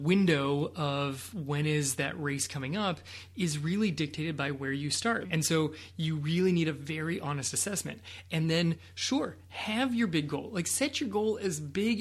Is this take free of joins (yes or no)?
no